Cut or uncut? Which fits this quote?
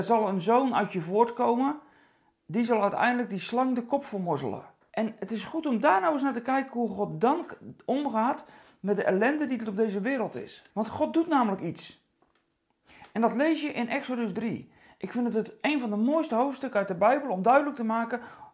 cut